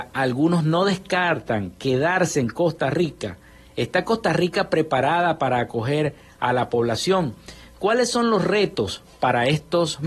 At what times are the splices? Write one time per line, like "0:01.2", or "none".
none